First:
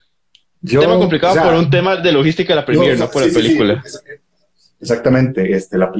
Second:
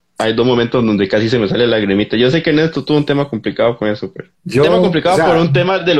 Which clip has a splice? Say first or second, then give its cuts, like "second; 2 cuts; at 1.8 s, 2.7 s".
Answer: second; 1 cut; at 4.3 s